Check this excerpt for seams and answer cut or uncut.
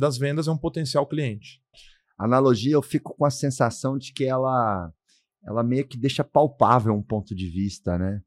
cut